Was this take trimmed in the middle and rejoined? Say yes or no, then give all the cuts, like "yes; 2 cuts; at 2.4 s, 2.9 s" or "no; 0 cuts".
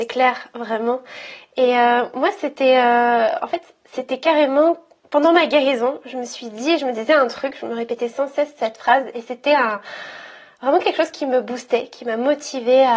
no; 0 cuts